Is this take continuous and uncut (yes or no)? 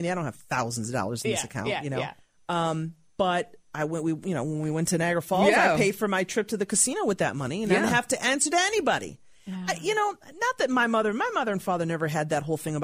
yes